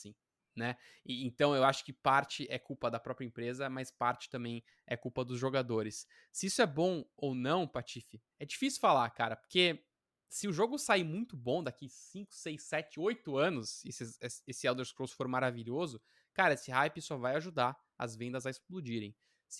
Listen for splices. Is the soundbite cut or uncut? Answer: cut